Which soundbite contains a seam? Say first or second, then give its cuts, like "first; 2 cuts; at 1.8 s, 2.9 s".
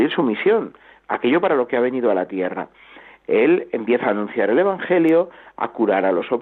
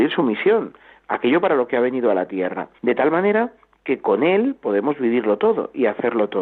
second; 1 cut; at 2.8 s